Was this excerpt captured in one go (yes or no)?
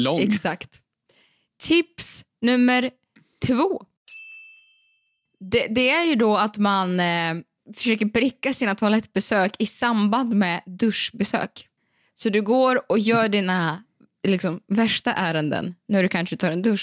yes